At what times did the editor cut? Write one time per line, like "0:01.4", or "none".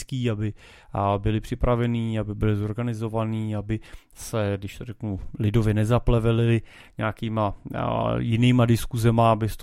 none